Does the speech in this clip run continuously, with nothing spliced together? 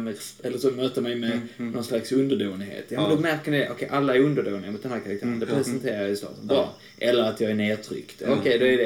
yes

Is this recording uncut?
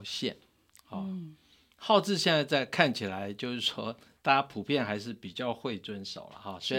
yes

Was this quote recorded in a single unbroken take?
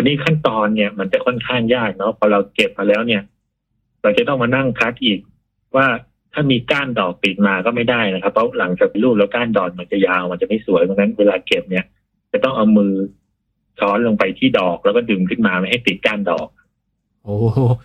no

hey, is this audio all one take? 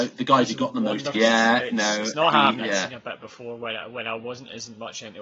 no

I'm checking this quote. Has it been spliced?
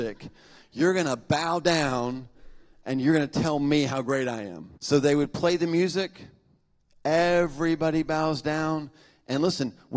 yes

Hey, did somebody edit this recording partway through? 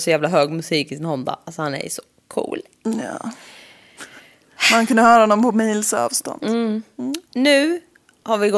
yes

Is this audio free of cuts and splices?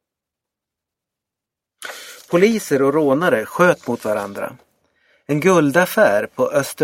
yes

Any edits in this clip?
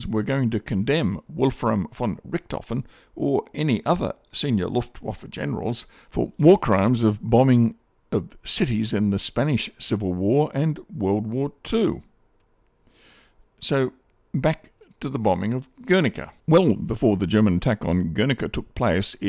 no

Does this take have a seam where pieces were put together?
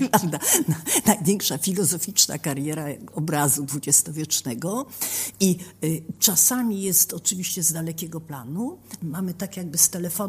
yes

